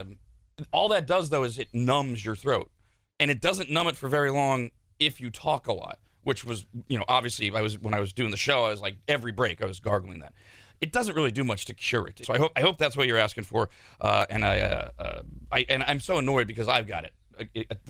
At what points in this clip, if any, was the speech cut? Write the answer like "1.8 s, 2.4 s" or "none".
12.2 s